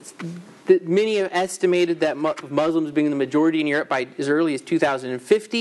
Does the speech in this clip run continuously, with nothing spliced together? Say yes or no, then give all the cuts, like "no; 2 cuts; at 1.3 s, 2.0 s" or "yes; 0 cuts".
no; 1 cut; at 2.4 s